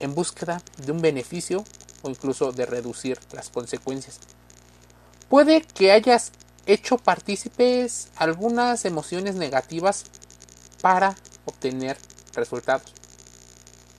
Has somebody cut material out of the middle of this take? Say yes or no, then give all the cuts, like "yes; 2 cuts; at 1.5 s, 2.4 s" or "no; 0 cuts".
no; 0 cuts